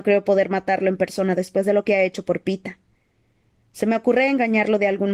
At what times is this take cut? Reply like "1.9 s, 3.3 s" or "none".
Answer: none